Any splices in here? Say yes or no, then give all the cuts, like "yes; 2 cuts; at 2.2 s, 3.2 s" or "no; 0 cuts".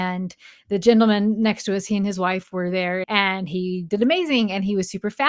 yes; 1 cut; at 3.0 s